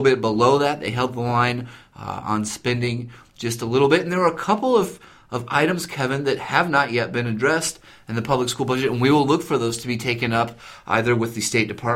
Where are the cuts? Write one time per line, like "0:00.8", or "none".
none